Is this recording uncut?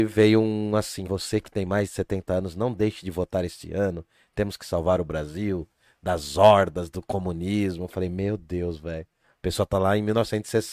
no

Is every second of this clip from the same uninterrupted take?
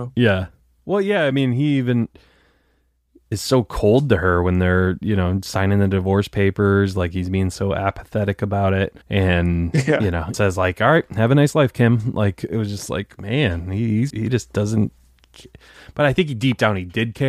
no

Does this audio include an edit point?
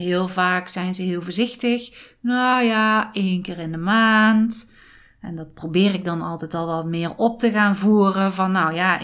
no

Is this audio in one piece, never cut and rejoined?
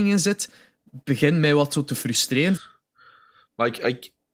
no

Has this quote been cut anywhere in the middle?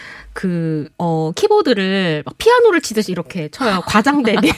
yes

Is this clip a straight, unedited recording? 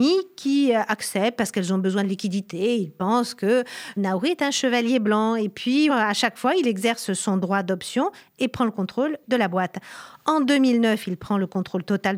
no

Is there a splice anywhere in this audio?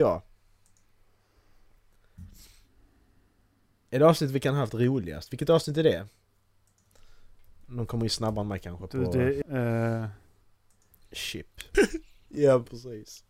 yes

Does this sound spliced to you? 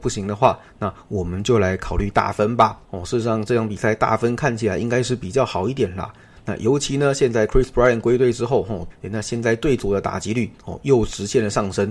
yes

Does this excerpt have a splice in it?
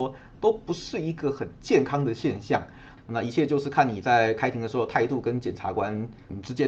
yes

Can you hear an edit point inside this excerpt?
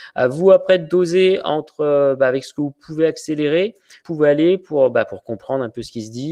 yes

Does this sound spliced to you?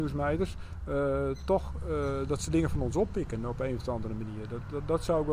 no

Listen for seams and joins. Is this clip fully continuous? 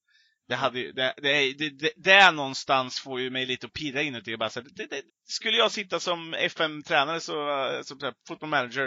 no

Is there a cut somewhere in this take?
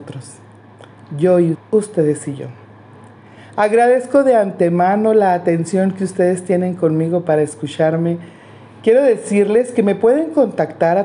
yes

